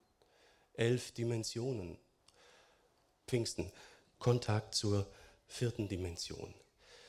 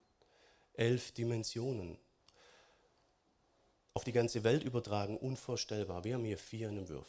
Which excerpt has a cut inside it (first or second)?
first